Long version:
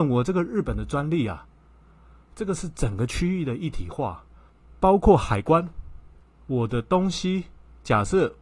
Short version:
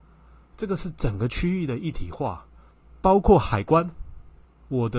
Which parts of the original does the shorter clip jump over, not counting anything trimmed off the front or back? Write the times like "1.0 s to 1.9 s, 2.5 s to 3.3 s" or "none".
none